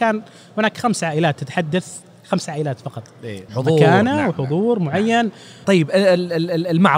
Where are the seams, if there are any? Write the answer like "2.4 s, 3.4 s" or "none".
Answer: 3.5 s, 5.6 s